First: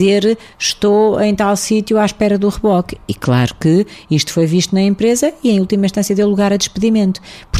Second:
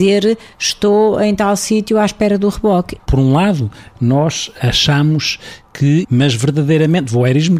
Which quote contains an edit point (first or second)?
second